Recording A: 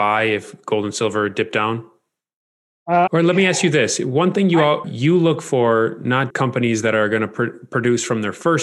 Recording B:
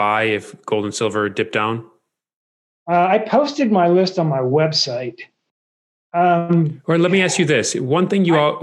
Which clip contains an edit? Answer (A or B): A